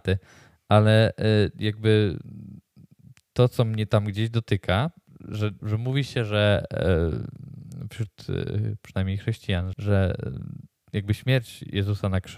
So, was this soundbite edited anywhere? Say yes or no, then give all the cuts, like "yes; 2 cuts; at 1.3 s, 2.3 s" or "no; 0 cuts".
yes; 2 cuts; at 5.6 s, 9.7 s